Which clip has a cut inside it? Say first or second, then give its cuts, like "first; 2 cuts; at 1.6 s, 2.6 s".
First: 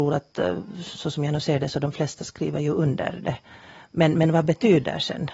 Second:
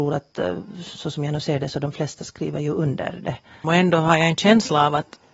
second; 1 cut; at 3.6 s